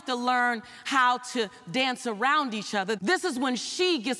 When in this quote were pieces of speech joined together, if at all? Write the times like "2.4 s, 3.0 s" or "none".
3.0 s

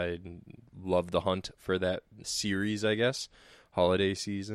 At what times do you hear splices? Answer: 2.2 s

